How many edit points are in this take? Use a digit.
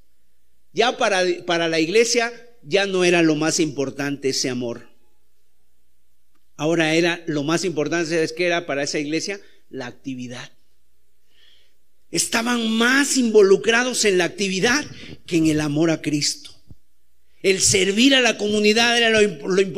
0